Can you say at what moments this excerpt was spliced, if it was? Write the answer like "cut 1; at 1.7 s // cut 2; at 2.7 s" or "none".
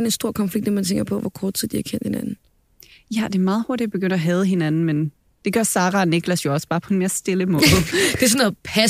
none

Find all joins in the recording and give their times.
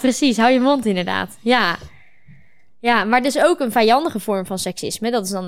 none

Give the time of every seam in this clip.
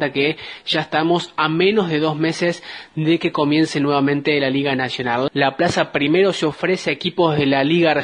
cut 1; at 5.3 s

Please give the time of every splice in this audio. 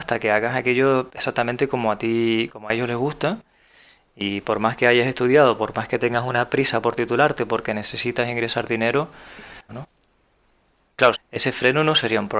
cut 1; at 9.7 s // cut 2; at 11.1 s

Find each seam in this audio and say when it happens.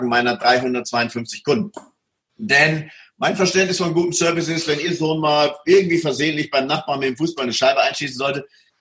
none

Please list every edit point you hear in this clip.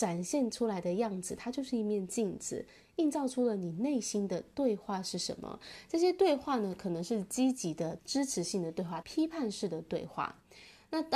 cut 1; at 8.0 s // cut 2; at 9.0 s

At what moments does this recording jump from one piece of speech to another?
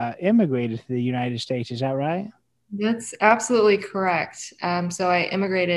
none

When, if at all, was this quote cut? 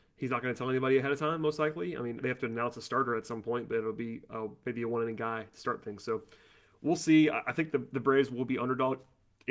cut 1; at 2.2 s

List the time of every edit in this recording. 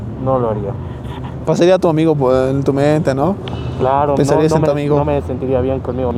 none

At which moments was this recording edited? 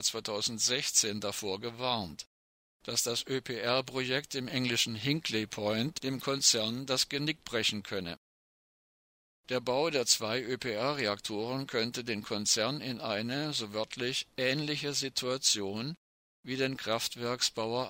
none

